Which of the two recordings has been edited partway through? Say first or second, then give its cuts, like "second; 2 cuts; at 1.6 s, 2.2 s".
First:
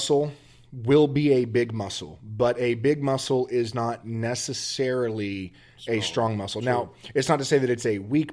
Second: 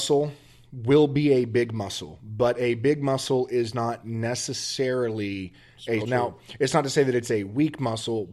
second; 1 cut; at 6.0 s